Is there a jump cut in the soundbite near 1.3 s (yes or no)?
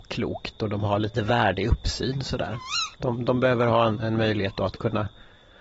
no